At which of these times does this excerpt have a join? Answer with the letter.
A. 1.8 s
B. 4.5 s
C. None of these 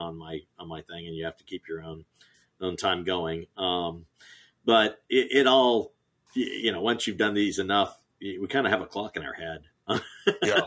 C